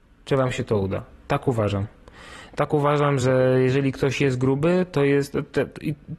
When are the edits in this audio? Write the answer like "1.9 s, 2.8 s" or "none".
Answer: none